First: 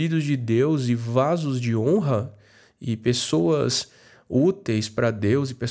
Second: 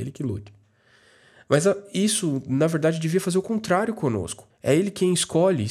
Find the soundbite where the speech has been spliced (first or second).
second